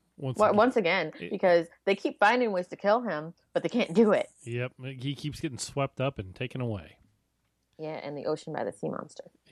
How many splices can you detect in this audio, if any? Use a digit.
0